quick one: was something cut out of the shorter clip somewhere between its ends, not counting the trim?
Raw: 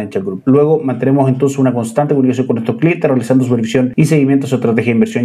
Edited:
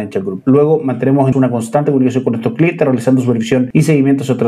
yes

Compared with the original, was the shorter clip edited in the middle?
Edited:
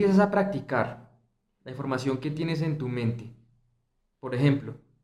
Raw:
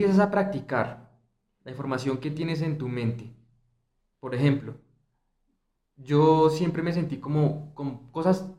no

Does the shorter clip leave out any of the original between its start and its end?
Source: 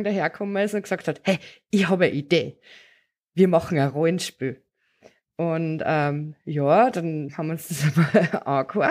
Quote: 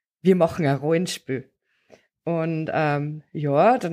no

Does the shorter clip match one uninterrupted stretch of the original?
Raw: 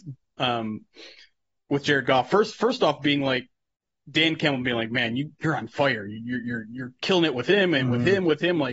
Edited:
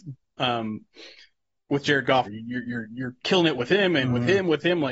no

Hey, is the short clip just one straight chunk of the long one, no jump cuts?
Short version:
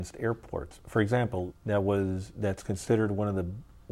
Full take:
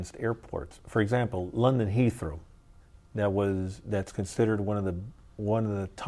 no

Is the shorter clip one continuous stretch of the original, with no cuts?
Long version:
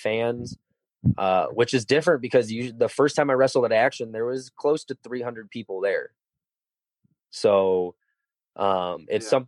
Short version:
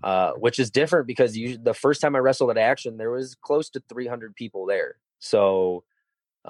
no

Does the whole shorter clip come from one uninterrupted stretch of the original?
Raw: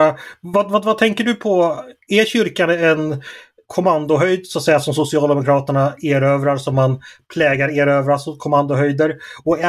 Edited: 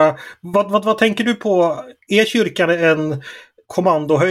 yes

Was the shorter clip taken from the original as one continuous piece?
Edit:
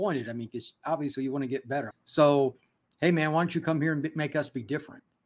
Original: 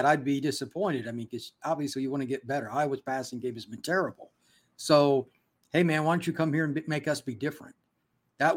no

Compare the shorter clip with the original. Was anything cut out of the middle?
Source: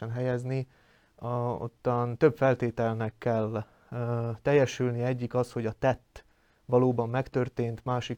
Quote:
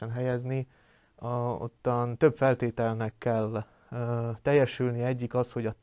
no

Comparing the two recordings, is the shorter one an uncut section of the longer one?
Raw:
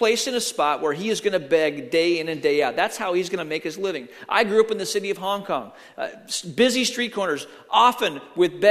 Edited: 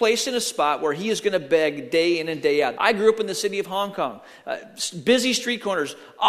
no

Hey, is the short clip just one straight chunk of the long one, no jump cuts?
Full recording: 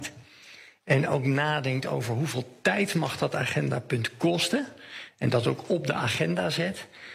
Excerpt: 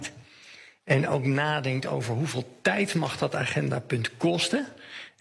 yes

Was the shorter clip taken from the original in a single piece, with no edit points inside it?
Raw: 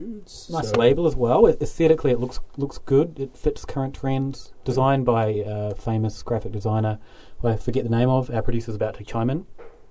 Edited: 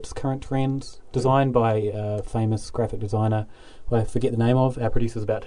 yes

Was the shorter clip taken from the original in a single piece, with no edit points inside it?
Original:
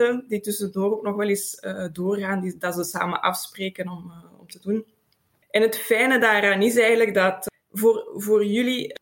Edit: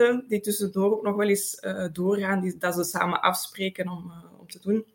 yes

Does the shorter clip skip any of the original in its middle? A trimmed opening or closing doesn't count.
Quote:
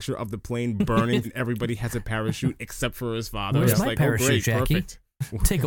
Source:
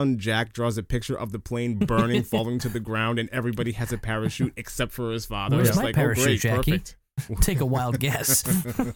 yes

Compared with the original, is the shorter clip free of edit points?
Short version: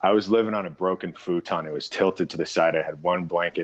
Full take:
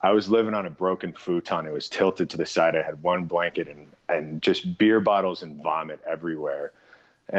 yes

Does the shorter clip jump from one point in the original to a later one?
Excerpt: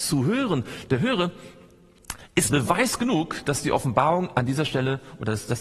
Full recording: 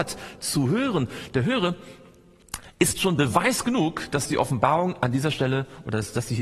yes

